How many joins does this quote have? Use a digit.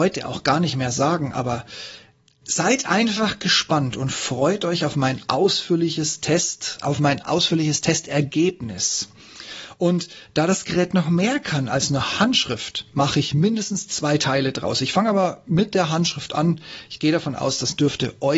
0